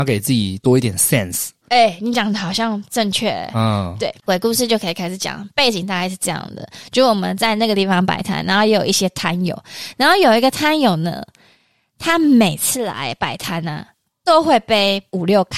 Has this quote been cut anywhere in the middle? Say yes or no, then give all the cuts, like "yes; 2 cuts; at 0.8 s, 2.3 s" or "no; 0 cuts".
no; 0 cuts